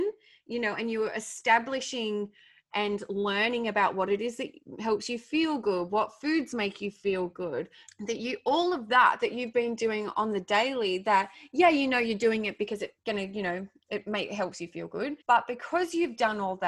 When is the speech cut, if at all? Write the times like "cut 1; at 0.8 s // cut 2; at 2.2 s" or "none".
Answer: cut 1; at 7.9 s // cut 2; at 13.0 s // cut 3; at 15.2 s